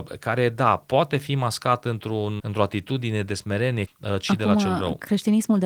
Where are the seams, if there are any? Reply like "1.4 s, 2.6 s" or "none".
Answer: 2.4 s, 3.9 s